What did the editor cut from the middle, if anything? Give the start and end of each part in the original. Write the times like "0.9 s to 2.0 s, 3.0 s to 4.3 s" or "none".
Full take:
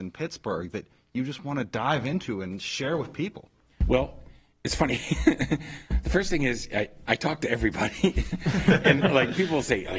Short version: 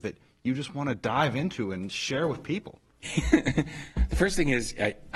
3.7 s to 5.0 s